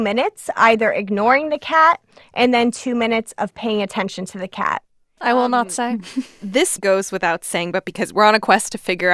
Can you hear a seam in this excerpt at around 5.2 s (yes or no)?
yes